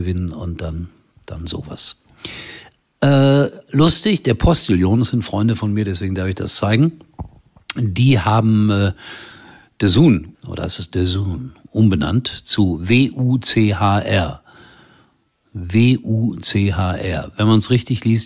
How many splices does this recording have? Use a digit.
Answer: 2